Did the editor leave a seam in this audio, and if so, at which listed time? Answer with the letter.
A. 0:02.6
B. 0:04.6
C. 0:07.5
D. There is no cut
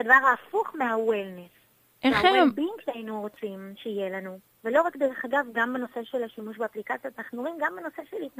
B